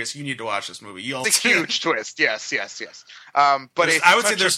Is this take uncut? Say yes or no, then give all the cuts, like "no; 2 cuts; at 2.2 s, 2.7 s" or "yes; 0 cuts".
no; 1 cut; at 1.2 s